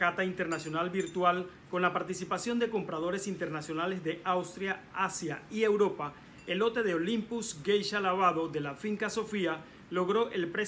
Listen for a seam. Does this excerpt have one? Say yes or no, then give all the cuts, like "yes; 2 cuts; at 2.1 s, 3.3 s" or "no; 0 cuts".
no; 0 cuts